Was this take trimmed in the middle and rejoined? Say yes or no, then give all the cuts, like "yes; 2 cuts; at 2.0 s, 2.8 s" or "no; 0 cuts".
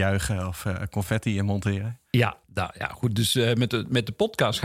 yes; 1 cut; at 2.4 s